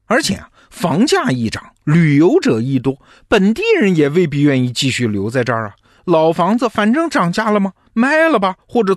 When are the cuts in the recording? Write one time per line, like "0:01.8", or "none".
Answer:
none

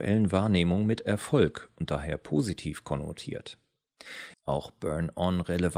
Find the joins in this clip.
0:04.3

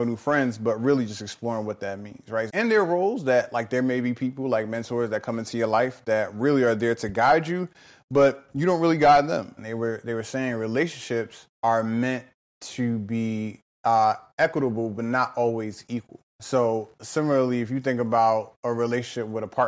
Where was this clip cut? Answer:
0:02.5
0:09.6

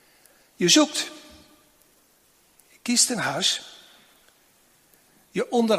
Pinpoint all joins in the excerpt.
none

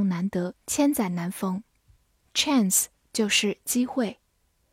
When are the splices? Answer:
none

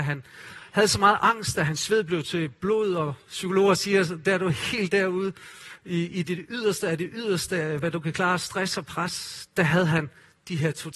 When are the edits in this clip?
none

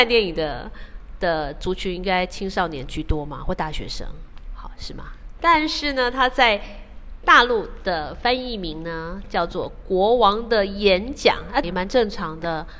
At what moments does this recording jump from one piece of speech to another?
0:05.4
0:11.6

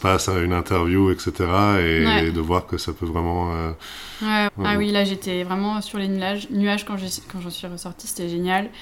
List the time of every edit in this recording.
0:04.5

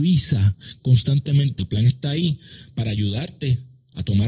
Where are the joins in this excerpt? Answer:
0:01.6

